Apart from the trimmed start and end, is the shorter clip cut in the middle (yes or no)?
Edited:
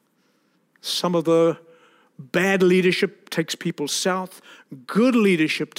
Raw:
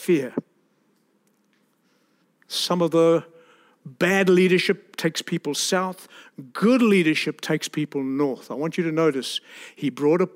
no